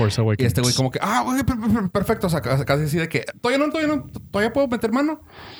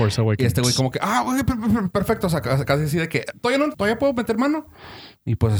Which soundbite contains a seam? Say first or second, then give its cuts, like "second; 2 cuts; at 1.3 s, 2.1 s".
second; 1 cut; at 3.7 s